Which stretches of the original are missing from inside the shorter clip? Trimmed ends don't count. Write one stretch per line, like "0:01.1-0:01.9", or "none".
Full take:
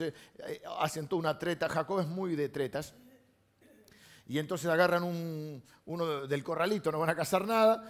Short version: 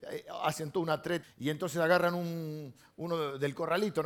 0:01.6-0:04.1